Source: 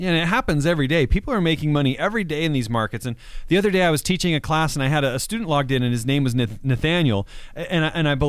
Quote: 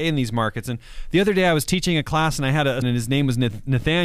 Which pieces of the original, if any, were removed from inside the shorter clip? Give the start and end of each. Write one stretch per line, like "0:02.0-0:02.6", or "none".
0:05.2-0:05.8